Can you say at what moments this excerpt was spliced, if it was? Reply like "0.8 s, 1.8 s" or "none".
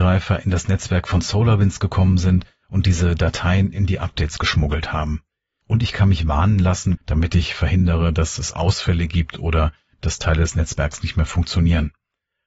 5.6 s, 6.9 s